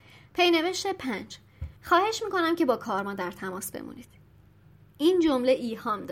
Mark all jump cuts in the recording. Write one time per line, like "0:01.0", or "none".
0:01.8